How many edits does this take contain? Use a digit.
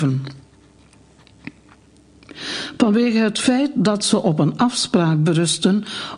0